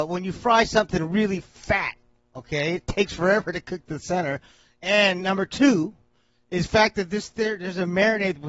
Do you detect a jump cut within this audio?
no; 0 cuts

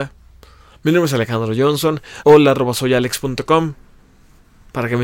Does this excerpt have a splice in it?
yes; 1 cut; at 2.2 s

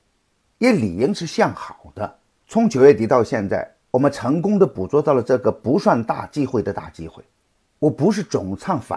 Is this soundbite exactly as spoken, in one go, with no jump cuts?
no; 3 cuts; at 2.3 s, 3.8 s, 7.7 s

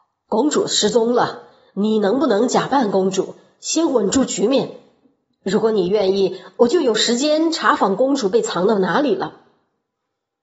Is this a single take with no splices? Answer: yes; 0 cuts

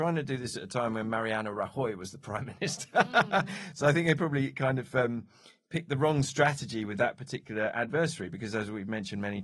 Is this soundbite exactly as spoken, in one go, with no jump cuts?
yes; 0 cuts

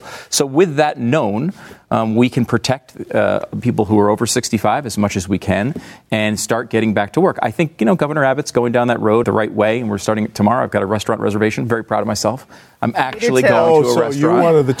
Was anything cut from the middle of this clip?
yes; 1 cut; at 9.2 s

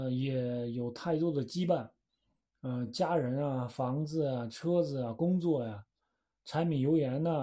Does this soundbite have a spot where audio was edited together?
no; 0 cuts

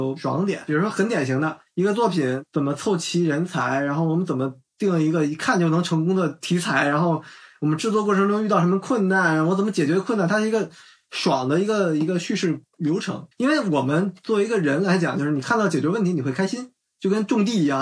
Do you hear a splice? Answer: yes; 1 cut; at 13.3 s

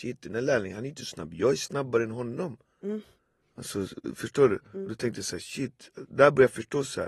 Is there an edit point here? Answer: no; 0 cuts

